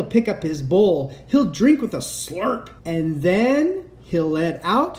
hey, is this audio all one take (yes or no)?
no